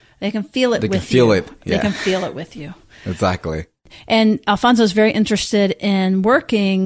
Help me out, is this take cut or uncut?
uncut